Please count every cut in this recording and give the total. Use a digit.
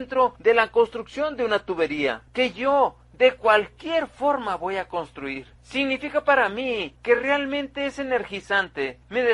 0